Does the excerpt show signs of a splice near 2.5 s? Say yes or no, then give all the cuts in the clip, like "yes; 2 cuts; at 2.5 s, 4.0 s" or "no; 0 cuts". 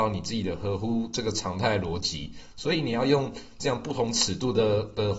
yes; 1 cut; at 2.5 s